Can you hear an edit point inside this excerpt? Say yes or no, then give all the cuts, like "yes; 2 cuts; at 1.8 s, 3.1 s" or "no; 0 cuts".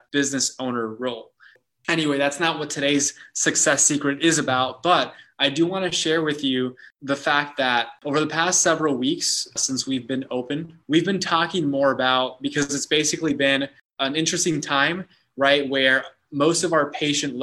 no; 0 cuts